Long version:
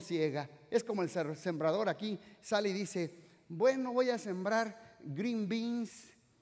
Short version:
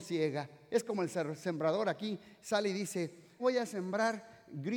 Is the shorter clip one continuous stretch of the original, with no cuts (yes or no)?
no